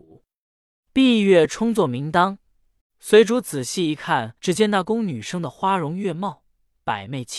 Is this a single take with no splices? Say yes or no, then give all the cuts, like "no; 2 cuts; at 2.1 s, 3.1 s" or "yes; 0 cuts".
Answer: no; 2 cuts; at 2.8 s, 4.4 s